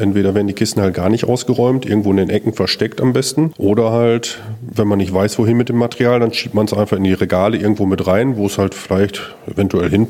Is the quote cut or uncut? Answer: uncut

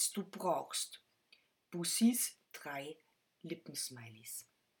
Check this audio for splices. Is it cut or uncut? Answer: cut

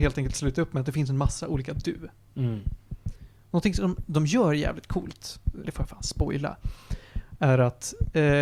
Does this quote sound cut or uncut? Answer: cut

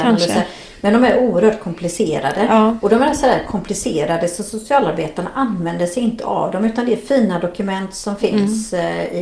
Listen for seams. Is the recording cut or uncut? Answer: uncut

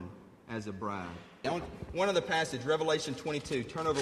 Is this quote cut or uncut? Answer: cut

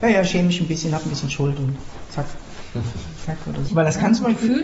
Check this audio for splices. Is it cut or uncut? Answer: cut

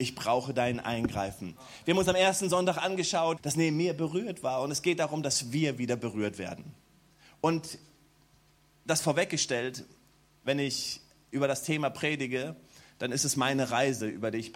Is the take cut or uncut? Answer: cut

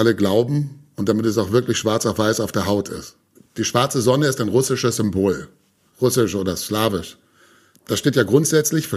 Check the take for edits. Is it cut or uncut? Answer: cut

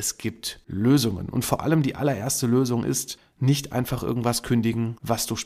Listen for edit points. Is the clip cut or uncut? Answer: uncut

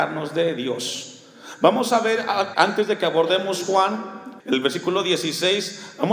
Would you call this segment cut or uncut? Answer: cut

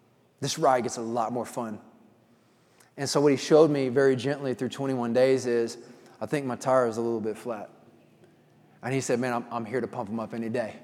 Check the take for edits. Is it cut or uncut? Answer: uncut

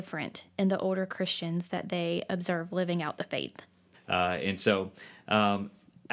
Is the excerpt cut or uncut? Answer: cut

